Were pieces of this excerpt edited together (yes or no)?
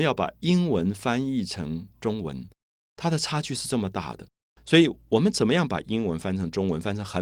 yes